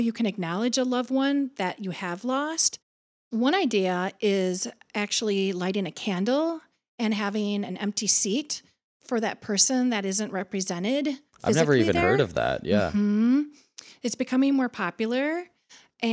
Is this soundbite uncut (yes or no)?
yes